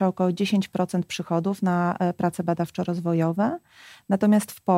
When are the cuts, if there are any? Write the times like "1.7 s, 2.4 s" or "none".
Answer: none